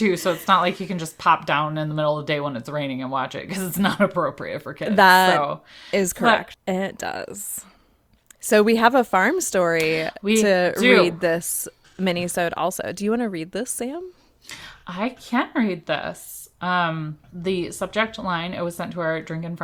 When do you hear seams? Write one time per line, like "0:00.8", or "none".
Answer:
0:06.5
0:17.2